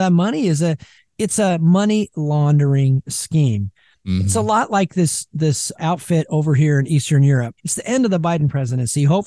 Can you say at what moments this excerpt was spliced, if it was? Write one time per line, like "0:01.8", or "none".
0:05.8
0:07.6